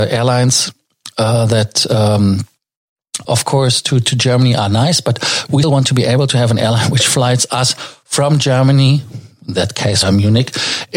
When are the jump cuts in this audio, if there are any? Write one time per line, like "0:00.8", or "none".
0:03.2
0:05.6
0:10.0